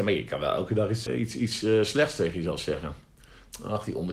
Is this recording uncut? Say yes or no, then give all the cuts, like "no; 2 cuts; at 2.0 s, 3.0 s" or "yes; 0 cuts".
no; 1 cut; at 1.1 s